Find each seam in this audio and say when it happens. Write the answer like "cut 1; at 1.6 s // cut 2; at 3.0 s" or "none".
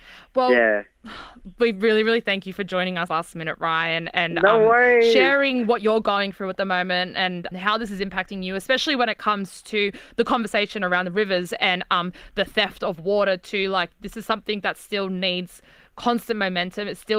cut 1; at 3.1 s // cut 2; at 7.5 s

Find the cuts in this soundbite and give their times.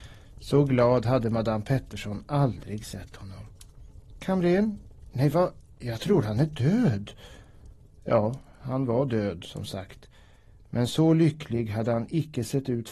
cut 1; at 7.9 s

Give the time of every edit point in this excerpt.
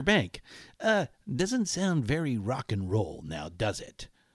none

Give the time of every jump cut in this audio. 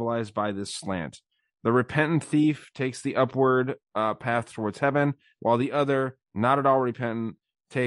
none

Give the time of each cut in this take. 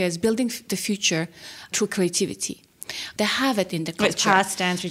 cut 1; at 3.2 s

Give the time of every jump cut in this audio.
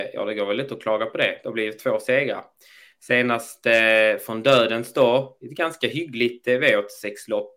none

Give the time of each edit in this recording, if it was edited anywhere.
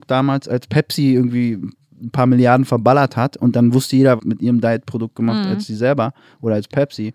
cut 1; at 4.2 s

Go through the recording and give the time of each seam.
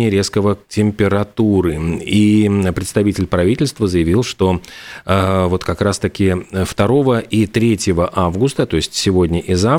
none

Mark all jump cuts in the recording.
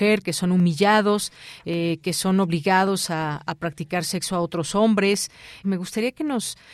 cut 1; at 5.6 s

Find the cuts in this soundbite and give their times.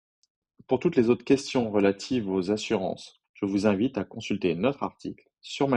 cut 1; at 3.2 s

